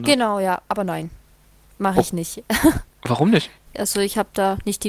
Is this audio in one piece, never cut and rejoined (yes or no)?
no